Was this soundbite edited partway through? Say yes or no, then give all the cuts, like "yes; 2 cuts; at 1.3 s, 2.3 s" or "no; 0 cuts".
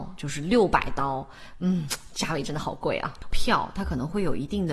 yes; 1 cut; at 3.3 s